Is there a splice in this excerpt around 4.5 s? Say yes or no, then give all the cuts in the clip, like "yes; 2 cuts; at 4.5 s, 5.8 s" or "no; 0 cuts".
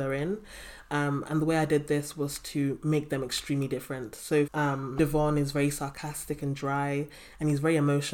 yes; 1 cut; at 4.5 s